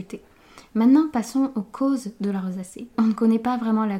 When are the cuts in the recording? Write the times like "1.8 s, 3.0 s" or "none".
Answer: 2.9 s